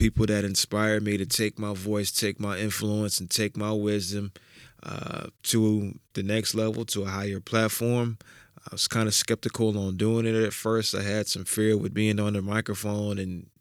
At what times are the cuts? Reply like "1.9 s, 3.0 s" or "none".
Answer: 5.3 s